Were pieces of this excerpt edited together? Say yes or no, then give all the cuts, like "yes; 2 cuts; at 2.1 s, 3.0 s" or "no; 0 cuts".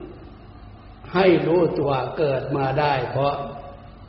yes; 1 cut; at 1.8 s